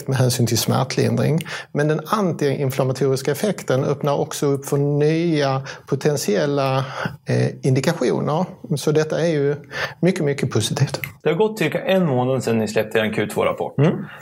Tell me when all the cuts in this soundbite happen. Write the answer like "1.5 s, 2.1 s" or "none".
none